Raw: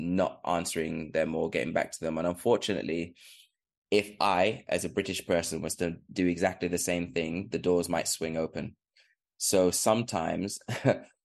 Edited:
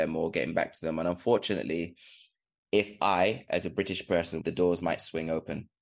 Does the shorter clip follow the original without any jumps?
no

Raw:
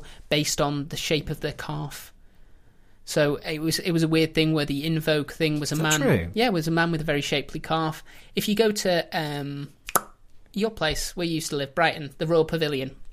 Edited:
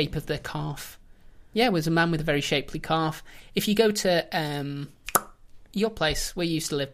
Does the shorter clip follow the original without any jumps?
no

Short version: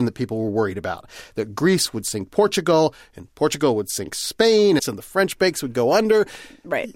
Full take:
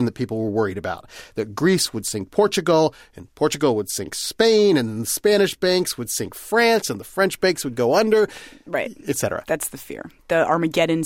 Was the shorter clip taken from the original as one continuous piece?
no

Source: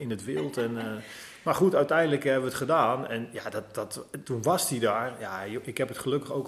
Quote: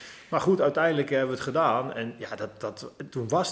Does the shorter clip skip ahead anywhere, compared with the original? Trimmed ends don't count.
no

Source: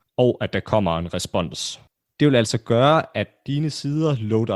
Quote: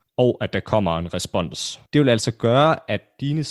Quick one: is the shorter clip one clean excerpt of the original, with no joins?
no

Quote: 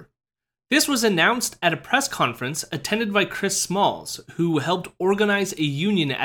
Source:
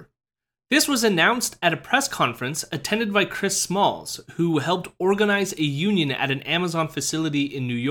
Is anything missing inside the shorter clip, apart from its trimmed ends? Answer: no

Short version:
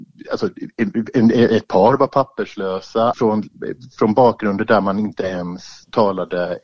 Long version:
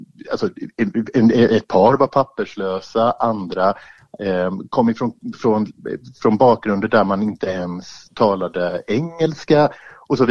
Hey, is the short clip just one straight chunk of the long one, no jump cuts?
no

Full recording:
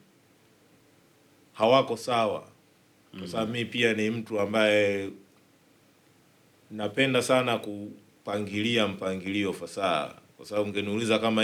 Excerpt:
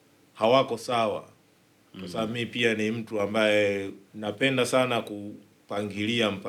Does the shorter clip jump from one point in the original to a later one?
yes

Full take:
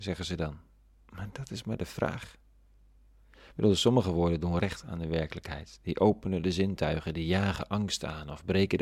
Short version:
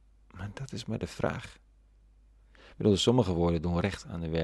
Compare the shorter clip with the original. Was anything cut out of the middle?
no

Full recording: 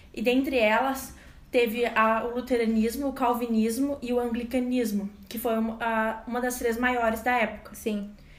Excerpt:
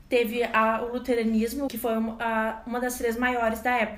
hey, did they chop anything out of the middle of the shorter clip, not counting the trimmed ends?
yes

